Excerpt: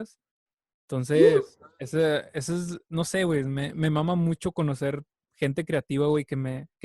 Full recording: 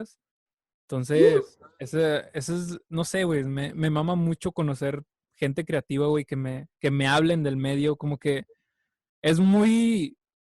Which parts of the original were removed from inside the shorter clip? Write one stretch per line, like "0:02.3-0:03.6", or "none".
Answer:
none